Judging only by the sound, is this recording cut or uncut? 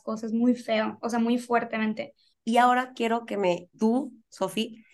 cut